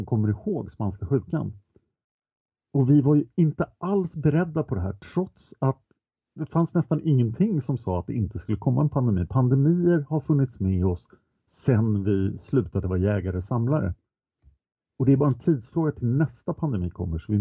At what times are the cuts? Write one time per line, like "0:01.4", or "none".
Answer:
none